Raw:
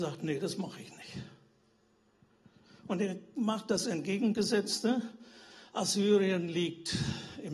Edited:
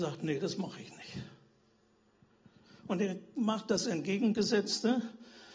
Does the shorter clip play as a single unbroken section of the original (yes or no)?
yes